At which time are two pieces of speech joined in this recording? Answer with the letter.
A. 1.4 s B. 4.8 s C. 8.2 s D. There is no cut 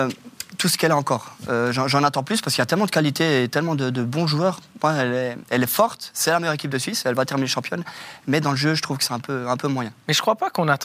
D